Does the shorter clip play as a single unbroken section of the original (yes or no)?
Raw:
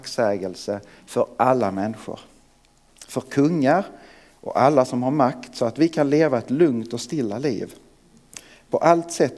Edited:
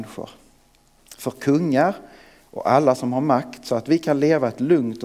yes